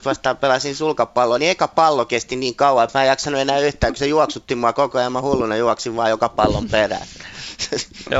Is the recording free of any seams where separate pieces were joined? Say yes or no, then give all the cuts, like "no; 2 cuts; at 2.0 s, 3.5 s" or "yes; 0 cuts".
yes; 0 cuts